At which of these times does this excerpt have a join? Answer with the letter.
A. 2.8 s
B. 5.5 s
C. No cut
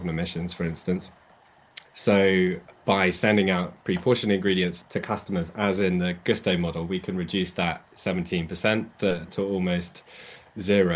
C